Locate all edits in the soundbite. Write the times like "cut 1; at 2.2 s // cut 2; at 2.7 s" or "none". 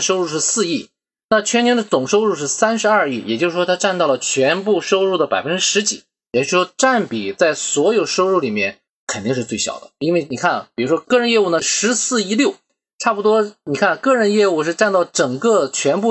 none